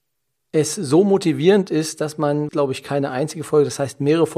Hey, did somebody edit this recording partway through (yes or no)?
yes